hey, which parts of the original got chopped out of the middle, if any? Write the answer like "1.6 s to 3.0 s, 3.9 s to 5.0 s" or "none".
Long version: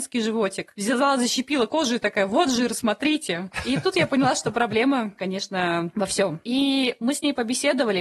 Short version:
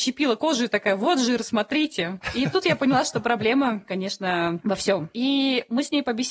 none

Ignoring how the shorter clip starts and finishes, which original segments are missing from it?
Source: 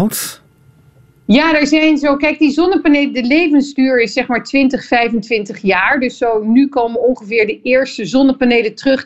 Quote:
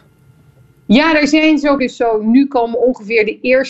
2.2 s to 6.0 s

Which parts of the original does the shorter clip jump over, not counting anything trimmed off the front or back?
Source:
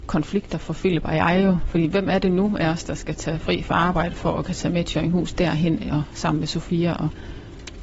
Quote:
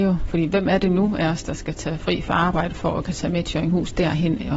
none

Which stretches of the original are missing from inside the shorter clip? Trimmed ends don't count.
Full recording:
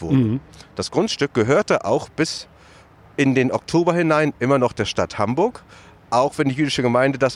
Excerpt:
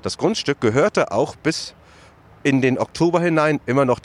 none

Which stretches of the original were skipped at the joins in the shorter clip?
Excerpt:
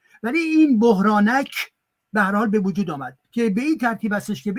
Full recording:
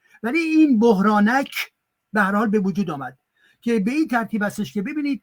3.2 s to 3.5 s

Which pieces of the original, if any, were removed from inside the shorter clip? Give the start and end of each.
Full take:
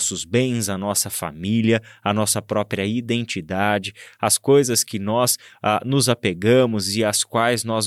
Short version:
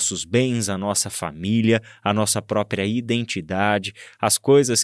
none

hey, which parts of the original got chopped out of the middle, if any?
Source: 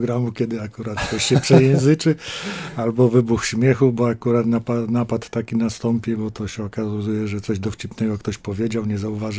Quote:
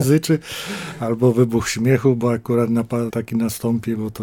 4.9 s to 5.3 s

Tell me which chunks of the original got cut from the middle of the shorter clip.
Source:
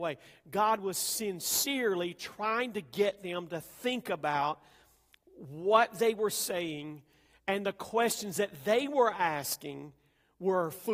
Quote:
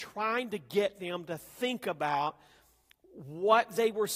none

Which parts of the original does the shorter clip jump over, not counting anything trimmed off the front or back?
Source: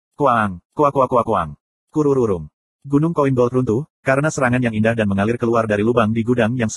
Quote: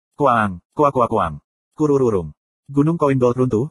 0.9 s to 1.1 s

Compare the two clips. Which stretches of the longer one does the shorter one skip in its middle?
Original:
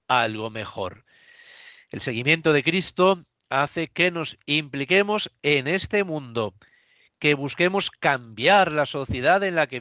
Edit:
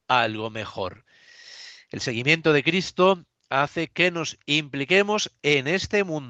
none

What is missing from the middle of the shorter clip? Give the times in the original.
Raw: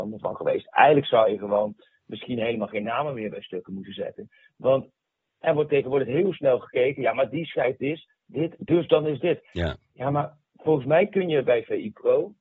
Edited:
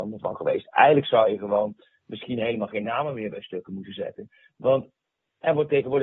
none

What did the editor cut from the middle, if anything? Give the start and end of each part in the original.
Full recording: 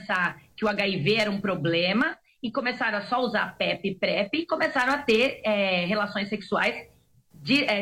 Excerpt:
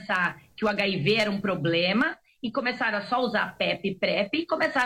none

